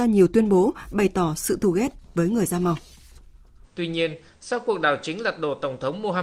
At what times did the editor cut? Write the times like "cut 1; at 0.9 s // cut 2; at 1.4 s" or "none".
cut 1; at 3.6 s